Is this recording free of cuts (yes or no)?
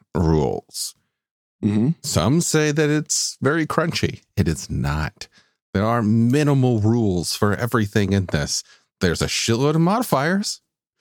yes